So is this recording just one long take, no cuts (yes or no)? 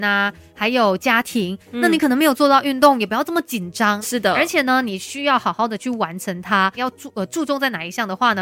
no